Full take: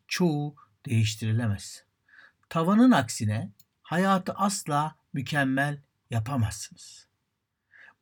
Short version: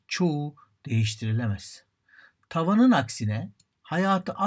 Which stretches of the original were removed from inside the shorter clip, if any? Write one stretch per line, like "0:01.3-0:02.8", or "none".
none